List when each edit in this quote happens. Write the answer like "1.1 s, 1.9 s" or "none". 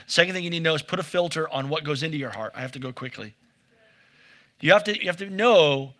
5.0 s